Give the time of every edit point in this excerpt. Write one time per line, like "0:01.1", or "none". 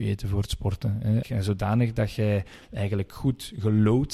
0:01.2